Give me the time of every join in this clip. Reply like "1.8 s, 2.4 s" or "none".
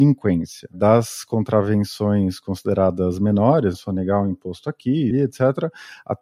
3.7 s, 5.1 s